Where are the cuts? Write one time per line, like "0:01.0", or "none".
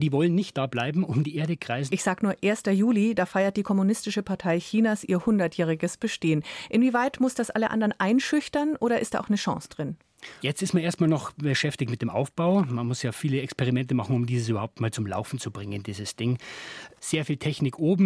0:01.9
0:10.4